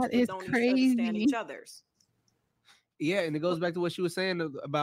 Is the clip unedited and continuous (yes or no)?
yes